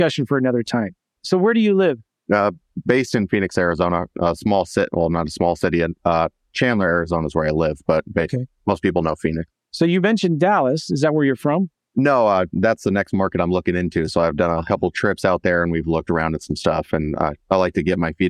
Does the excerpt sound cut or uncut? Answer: uncut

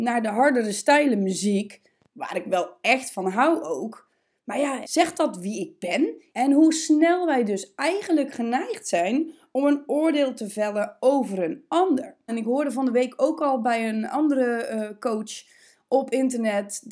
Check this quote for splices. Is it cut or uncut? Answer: cut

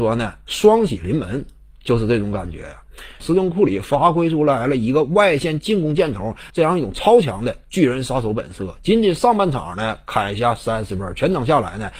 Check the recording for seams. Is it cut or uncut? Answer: cut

